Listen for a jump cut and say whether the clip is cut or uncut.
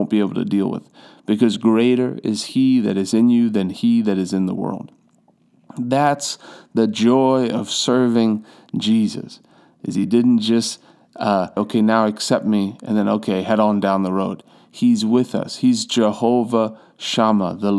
cut